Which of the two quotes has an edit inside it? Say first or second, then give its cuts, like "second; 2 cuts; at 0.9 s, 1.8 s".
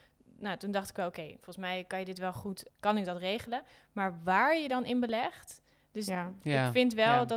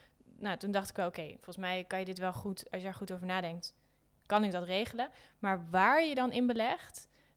first; 1 cut; at 2.7 s